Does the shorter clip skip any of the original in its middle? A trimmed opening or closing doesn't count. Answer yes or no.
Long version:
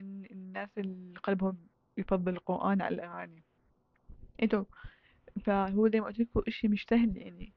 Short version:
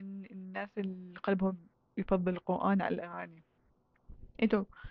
no